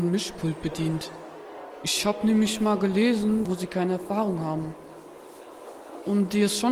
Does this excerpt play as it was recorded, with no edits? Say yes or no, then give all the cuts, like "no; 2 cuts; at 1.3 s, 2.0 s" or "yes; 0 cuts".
no; 1 cut; at 3.4 s